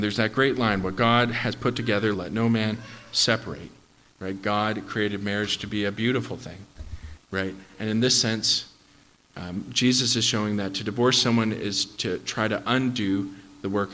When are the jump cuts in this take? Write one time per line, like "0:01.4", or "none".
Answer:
0:02.1
0:04.1
0:07.2